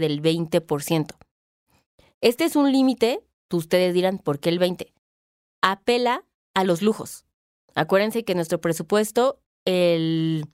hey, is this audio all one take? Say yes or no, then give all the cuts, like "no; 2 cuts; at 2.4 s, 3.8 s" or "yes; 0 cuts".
yes; 0 cuts